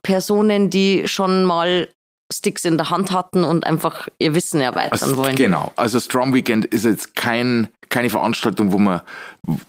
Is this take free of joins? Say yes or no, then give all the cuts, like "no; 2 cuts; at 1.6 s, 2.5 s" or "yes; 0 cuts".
yes; 0 cuts